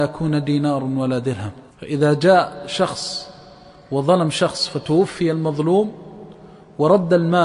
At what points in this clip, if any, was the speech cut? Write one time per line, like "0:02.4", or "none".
0:01.7